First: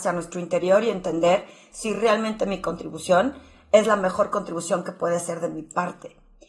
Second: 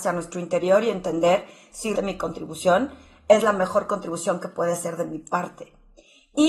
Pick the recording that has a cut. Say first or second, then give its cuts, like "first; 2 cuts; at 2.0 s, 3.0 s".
second; 1 cut; at 1.9 s